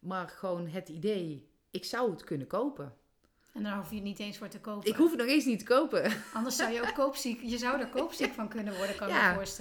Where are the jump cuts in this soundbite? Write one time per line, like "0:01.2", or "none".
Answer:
none